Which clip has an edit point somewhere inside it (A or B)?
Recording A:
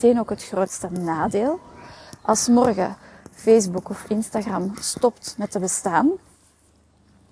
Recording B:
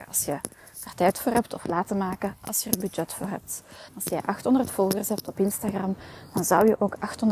B